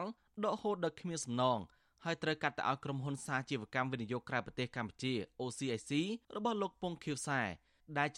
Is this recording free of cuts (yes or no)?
no